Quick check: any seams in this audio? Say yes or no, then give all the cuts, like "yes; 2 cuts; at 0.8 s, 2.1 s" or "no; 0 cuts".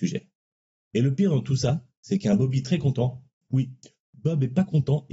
no; 0 cuts